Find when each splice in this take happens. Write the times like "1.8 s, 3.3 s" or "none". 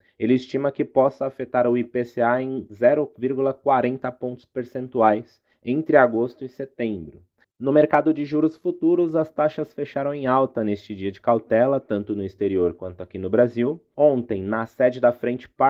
7.4 s